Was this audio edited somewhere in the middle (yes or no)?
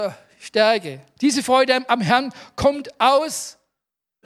yes